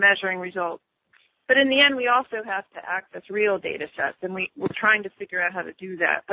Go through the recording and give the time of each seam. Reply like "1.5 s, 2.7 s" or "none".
none